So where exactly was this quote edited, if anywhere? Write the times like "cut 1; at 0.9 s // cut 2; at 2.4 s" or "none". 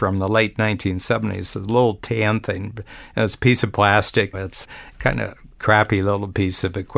cut 1; at 4.3 s